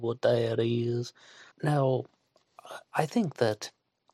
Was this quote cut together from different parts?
yes; 1 cut; at 1.5 s

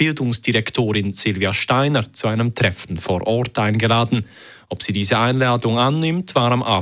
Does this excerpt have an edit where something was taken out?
no; 0 cuts

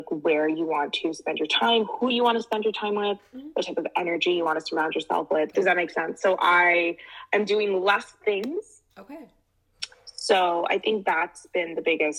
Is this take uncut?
no; 2 cuts; at 5.5 s, 8.9 s

